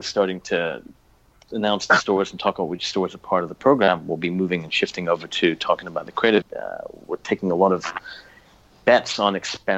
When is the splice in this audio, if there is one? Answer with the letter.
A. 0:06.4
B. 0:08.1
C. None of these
A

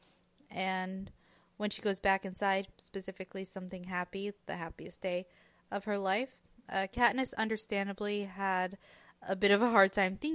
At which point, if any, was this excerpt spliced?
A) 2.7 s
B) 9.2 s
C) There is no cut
A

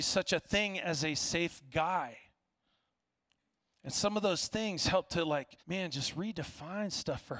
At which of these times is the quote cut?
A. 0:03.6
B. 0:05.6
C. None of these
B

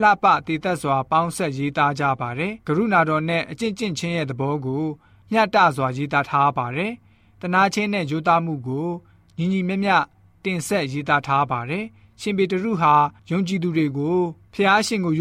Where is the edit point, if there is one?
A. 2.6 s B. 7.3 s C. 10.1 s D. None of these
A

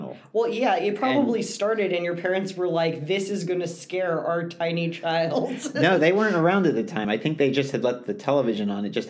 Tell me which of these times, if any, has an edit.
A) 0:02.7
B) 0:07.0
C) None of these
C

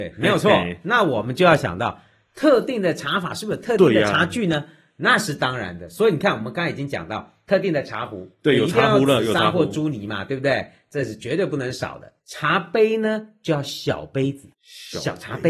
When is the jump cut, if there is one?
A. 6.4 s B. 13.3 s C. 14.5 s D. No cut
C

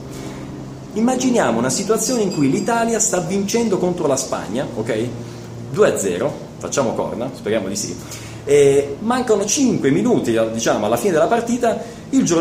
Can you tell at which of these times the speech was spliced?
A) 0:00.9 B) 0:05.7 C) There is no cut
A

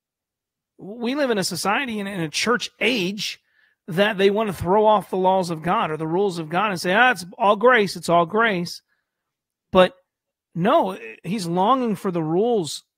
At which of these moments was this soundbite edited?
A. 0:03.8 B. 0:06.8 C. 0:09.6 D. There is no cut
D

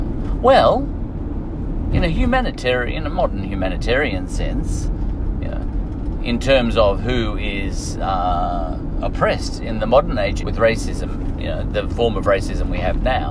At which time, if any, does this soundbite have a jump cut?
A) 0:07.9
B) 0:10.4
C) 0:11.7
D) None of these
B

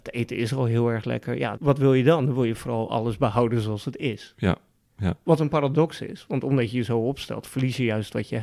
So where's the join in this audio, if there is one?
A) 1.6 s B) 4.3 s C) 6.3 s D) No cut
A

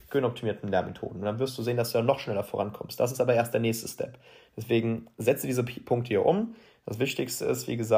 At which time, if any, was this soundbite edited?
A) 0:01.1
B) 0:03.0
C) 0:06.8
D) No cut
D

